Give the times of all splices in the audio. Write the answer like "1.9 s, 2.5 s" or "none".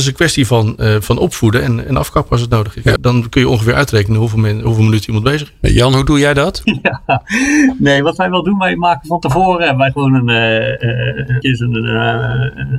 3.0 s, 6.6 s, 11.4 s